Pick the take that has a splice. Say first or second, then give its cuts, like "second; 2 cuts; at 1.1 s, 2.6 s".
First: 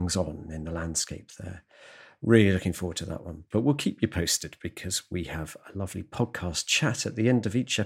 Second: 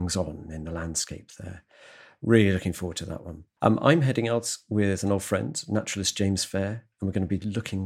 first; 1 cut; at 3.5 s